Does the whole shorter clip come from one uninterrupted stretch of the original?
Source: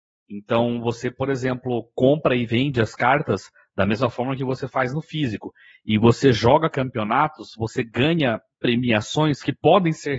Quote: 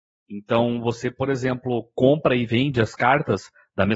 yes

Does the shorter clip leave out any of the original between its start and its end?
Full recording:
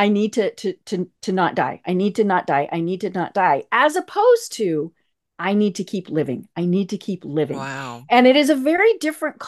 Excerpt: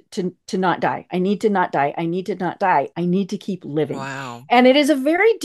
yes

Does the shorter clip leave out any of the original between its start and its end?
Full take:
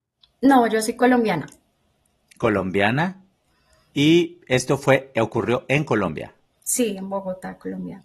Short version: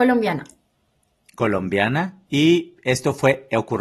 yes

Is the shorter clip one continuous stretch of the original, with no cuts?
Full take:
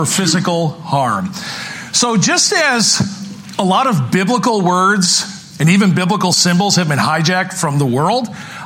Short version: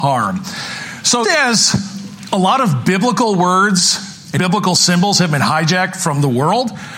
no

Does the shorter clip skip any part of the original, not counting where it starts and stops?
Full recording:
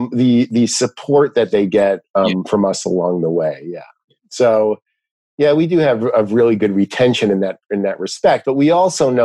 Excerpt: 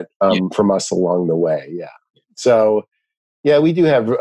no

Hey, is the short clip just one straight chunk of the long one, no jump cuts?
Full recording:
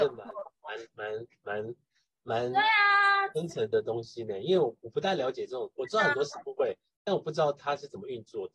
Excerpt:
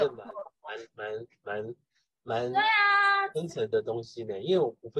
yes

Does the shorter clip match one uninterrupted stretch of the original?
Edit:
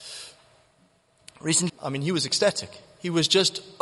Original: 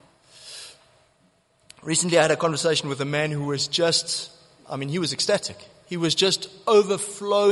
no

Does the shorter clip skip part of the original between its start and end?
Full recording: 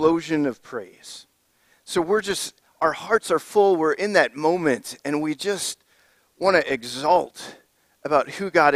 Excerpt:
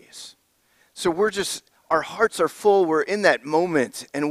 no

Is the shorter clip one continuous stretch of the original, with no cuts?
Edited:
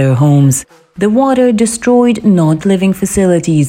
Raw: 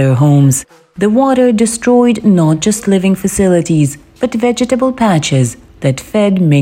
no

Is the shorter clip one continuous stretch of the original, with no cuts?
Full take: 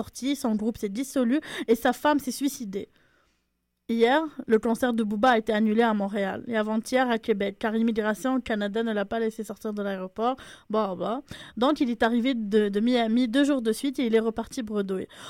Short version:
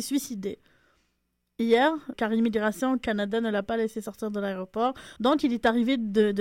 no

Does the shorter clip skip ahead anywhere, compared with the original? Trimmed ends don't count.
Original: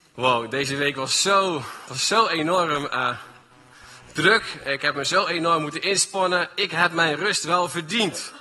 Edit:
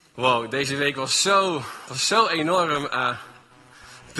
no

